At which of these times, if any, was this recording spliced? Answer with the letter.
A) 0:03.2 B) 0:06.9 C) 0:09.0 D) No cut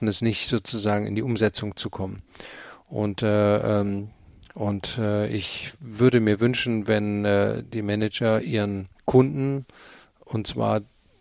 C